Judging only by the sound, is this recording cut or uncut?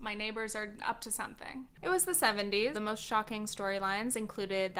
cut